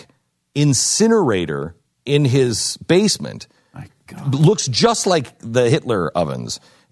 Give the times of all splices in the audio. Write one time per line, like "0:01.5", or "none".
none